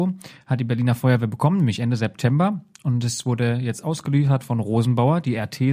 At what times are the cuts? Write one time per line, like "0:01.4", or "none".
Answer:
none

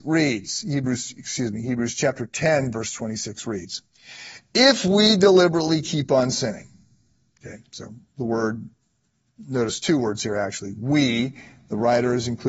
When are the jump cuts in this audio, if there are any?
none

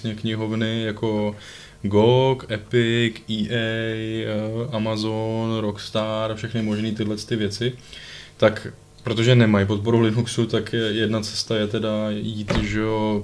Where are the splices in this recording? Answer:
none

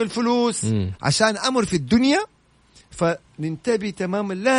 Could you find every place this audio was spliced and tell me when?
0:01.0

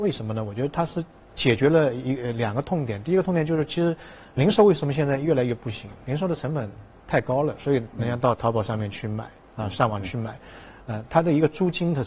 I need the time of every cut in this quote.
none

